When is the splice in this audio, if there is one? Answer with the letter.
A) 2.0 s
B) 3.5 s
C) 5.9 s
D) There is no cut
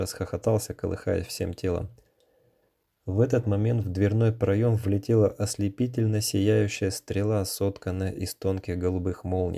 D